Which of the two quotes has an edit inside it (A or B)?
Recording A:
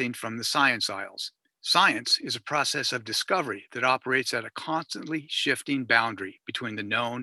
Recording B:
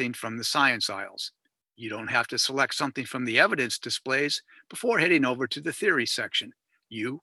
A